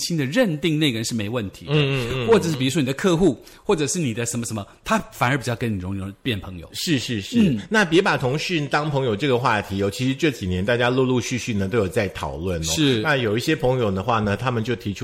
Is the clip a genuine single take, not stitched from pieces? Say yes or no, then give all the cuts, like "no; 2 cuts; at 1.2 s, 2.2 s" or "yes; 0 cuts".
yes; 0 cuts